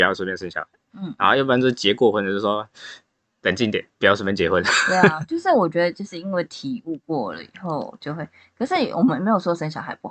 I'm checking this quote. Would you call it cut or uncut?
uncut